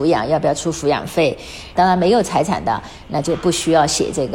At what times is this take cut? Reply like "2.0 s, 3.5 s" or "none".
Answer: 1.8 s